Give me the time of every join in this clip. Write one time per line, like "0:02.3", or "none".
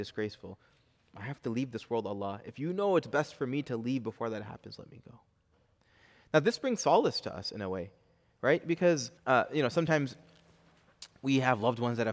0:09.2